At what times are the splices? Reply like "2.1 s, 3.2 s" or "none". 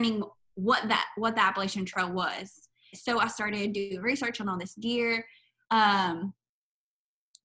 2.9 s, 5.6 s